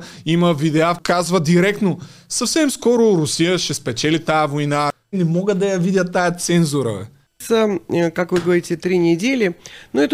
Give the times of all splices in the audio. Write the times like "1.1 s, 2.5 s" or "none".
5.1 s